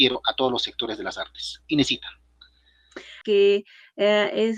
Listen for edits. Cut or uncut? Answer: cut